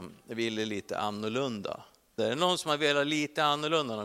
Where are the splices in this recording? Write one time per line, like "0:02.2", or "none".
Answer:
0:02.2